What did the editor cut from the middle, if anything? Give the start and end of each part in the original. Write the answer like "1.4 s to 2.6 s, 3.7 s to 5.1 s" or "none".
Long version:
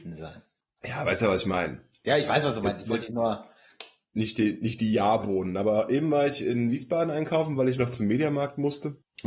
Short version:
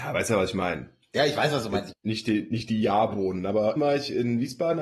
2.8 s to 4.0 s, 5.9 s to 6.1 s